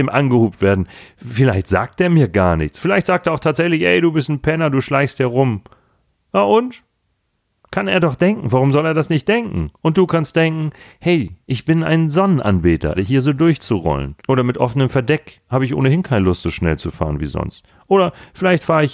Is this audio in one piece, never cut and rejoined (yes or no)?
no